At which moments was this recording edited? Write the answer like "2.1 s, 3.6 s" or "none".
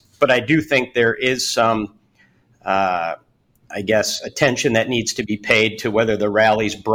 none